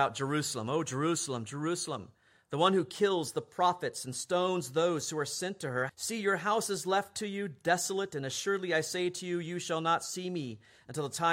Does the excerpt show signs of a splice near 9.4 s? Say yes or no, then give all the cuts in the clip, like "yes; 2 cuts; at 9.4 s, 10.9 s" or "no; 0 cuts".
no; 1 cut; at 5.9 s